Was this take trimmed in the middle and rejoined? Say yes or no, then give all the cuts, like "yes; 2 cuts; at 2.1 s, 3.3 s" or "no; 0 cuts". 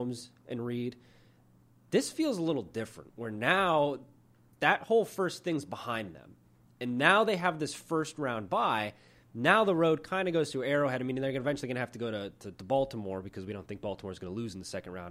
no; 0 cuts